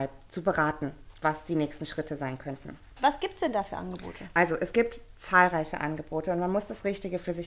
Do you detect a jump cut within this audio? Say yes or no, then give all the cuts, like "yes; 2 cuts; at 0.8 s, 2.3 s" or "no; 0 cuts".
no; 0 cuts